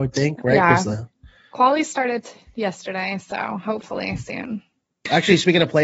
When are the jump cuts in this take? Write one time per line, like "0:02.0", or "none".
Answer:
none